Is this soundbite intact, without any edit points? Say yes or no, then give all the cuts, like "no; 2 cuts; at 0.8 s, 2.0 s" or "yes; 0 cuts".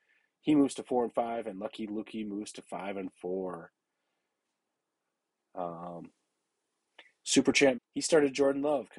no; 2 cuts; at 5.4 s, 7.8 s